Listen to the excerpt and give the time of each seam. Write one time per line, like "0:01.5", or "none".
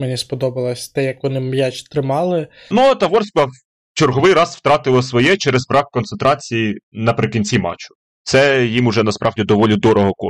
0:02.7